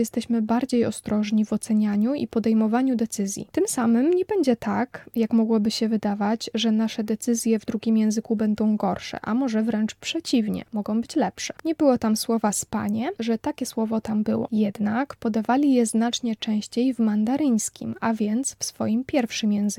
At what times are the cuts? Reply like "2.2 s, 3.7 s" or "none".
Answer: 11.6 s, 13.2 s